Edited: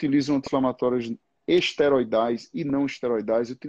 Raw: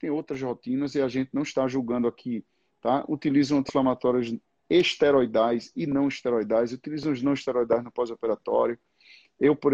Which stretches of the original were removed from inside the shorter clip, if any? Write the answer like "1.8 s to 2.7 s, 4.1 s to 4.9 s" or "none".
none